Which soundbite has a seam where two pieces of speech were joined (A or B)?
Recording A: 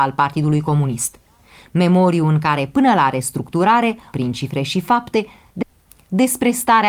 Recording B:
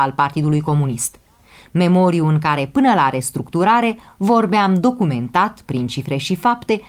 A